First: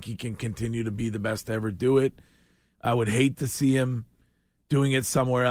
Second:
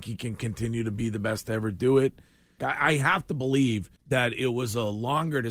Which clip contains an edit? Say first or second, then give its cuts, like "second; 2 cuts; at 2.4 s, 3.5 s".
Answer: second; 2 cuts; at 2.6 s, 4.0 s